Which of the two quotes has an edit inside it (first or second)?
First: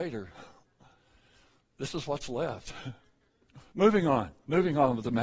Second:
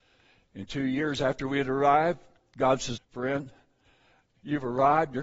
second